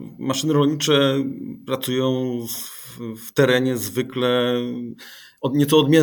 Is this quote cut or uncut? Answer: uncut